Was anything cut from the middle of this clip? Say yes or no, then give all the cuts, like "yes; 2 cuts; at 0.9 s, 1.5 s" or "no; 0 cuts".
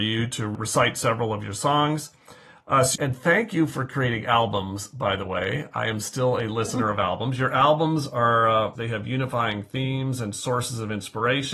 yes; 2 cuts; at 2.9 s, 8.7 s